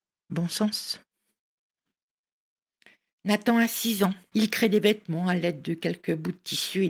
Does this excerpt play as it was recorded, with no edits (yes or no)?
no